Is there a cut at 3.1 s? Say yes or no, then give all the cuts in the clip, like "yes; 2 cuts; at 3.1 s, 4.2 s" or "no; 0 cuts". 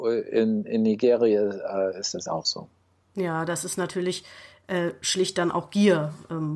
no; 0 cuts